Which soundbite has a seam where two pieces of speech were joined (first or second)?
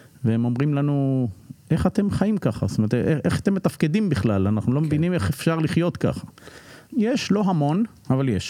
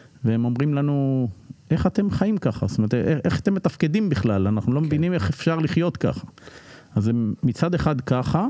first